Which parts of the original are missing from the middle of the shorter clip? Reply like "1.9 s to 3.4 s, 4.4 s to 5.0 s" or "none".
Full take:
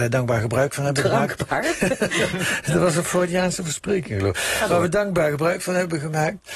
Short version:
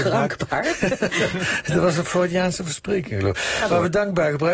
none